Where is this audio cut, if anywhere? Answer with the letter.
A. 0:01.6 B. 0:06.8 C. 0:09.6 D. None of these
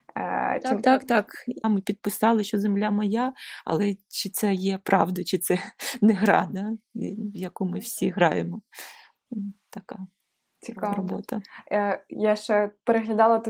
A